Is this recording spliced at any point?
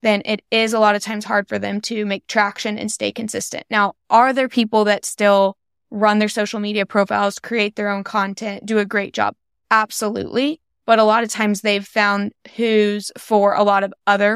no; 0 cuts

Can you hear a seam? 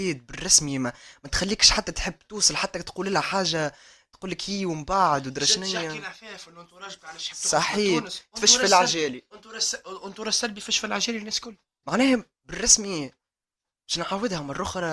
yes; 1 cut; at 11.8 s

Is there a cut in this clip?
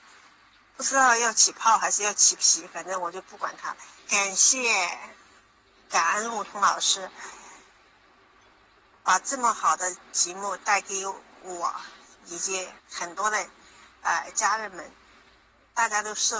yes; 2 cuts; at 4.0 s, 12.8 s

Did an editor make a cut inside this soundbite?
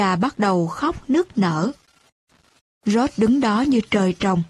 no; 0 cuts

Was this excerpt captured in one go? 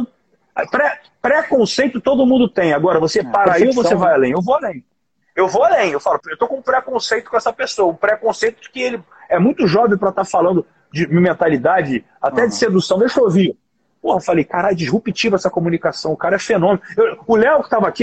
no; 1 cut; at 6.2 s

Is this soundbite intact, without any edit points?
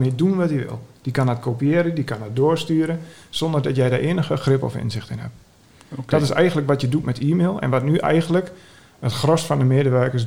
yes; 0 cuts

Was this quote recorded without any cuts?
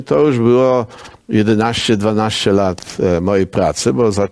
yes; 0 cuts

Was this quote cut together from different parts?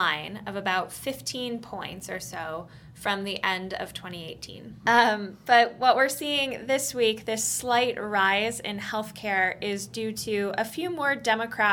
yes; 1 cut; at 4.8 s

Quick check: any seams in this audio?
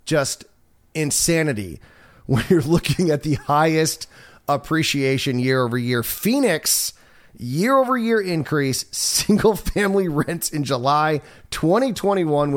no; 0 cuts

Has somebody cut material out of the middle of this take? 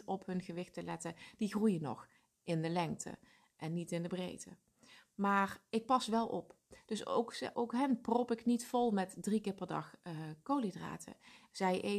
yes; 1 cut; at 7.5 s

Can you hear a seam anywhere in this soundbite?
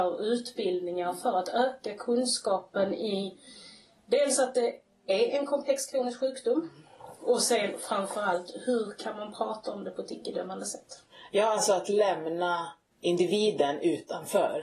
no; 0 cuts

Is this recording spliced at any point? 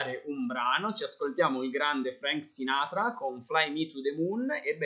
no; 0 cuts

